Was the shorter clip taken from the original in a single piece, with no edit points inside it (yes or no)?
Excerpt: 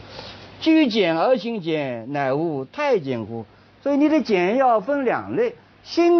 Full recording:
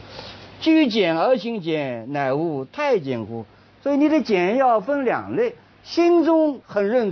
yes